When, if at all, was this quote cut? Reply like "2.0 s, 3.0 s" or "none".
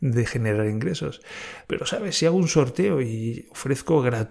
1.6 s